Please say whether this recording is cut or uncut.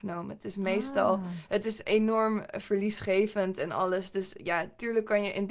cut